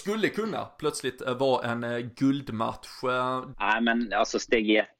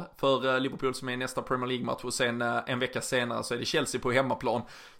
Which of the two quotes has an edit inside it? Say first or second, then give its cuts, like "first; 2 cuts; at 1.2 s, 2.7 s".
first; 1 cut; at 3.5 s